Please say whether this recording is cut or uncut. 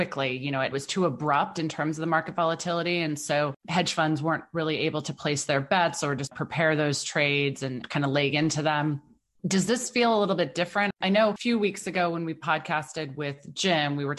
uncut